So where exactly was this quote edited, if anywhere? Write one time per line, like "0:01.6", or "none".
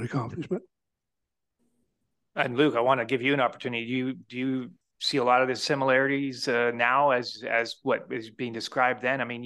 none